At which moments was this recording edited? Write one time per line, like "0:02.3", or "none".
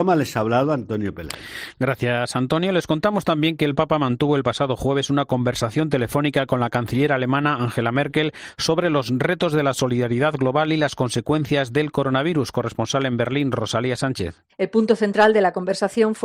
none

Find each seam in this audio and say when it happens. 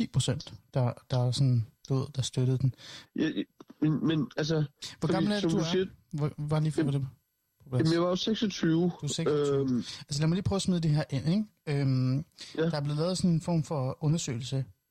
0:03.0

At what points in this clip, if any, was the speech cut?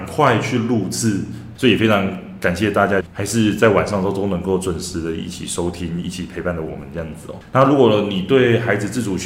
0:01.6
0:03.0

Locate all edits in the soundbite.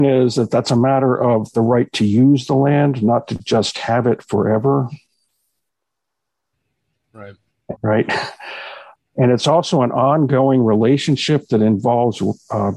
0:07.8
0:09.0

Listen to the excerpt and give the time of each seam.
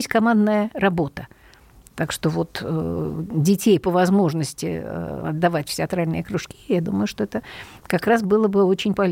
none

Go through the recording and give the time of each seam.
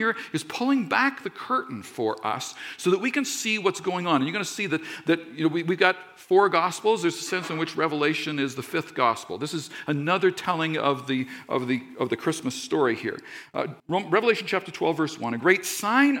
0:13.8

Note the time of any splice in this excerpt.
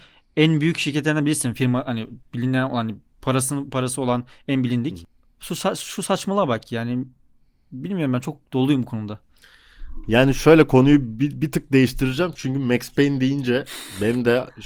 none

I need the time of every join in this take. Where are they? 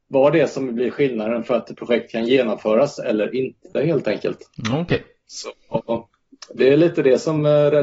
none

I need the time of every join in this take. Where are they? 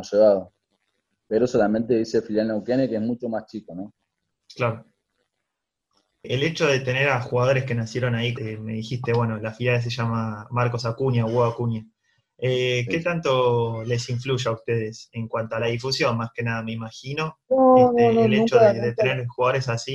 0:08.3

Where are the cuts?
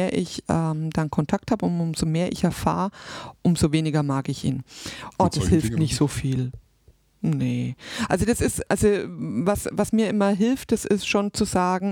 0:05.1
0:08.7

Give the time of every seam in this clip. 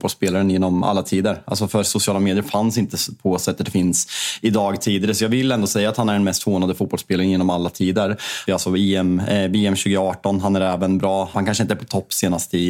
0:08.5
0:11.3

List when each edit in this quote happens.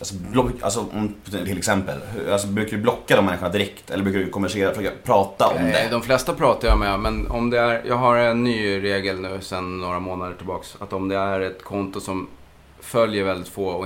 0:01.4

